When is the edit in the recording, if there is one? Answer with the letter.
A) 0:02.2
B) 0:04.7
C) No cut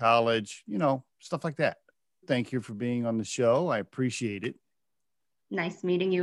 A